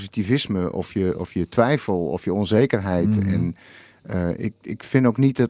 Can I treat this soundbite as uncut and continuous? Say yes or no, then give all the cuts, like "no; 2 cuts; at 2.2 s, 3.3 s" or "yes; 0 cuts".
yes; 0 cuts